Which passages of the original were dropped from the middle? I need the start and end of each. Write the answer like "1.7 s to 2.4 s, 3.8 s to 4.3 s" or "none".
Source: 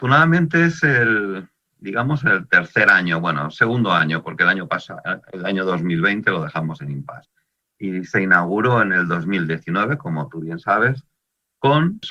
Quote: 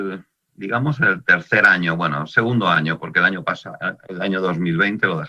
none